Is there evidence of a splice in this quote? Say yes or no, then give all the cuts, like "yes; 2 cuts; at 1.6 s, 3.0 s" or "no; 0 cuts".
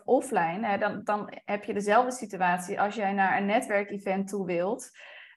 no; 0 cuts